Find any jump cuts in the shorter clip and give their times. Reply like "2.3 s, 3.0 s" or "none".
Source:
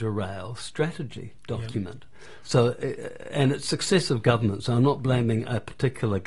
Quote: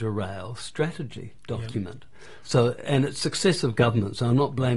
2.8 s